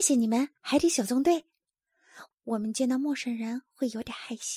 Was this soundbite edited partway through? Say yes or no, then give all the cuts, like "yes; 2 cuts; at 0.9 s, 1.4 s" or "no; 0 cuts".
yes; 1 cut; at 2.3 s